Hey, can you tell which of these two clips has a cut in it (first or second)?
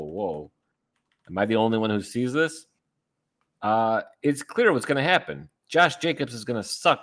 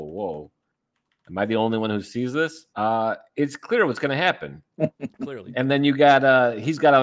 second